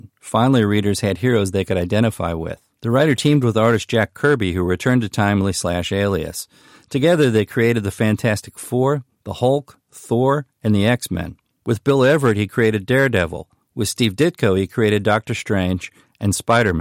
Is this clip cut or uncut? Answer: uncut